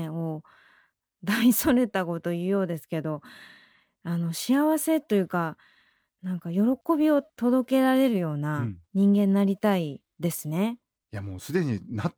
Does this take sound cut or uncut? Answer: cut